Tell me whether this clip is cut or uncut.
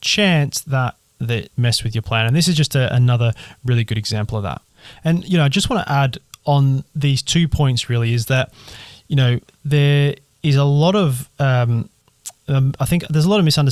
cut